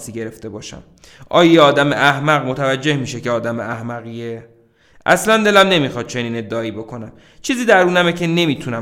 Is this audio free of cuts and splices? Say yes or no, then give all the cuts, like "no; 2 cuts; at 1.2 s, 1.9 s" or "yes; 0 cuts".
yes; 0 cuts